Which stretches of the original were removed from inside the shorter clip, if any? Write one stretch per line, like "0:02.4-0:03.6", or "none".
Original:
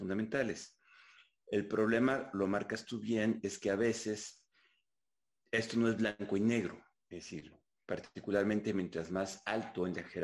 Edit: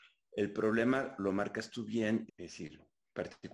0:03.4-0:07.0